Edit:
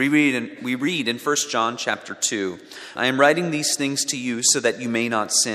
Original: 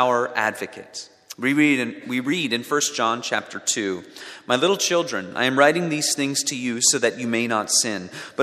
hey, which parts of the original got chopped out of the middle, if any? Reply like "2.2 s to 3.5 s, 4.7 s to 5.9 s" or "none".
4.4 s to 5.3 s